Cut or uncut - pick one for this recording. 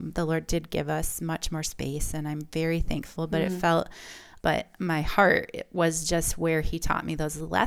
cut